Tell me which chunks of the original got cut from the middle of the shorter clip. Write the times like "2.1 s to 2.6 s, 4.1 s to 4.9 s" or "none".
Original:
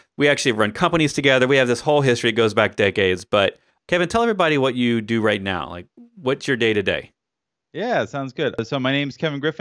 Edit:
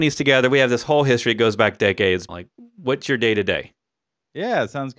3.3 s to 5.7 s